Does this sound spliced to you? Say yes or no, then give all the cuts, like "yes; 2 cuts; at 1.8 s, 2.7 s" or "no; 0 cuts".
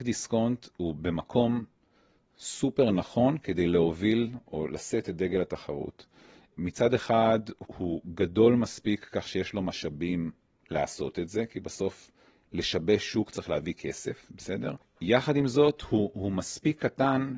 yes; 2 cuts; at 7.7 s, 14.8 s